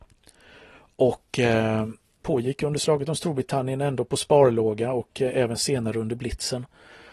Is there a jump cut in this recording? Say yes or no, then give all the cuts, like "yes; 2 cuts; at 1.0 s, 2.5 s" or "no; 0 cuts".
yes; 1 cut; at 2.2 s